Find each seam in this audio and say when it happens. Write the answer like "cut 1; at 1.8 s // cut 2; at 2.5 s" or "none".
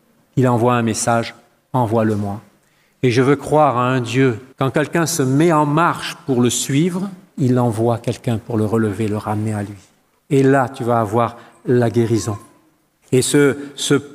cut 1; at 4.5 s // cut 2; at 7.3 s // cut 3; at 10.2 s